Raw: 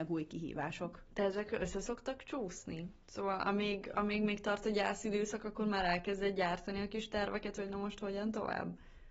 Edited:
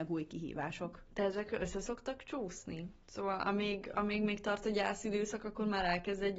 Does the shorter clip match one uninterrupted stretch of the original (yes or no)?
yes